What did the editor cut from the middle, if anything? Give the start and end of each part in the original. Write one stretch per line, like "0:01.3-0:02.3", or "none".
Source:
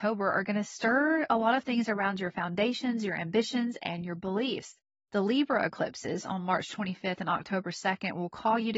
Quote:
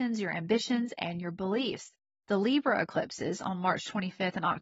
none